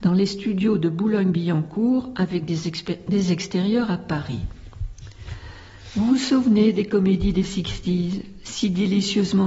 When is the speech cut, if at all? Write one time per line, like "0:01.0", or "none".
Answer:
none